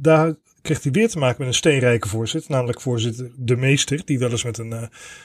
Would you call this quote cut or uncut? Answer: uncut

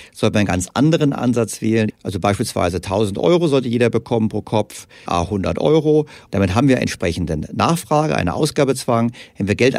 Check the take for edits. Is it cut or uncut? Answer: cut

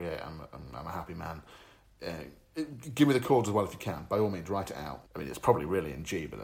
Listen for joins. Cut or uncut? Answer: cut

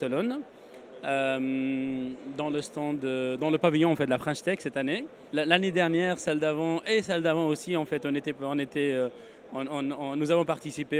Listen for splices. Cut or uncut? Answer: uncut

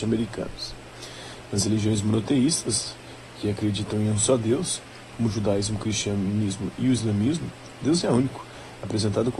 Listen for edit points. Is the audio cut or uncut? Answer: uncut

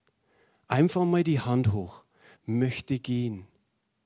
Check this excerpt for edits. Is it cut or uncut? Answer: cut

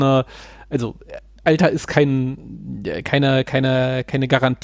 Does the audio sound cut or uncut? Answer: uncut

